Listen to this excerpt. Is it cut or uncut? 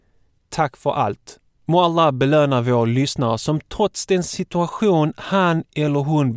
cut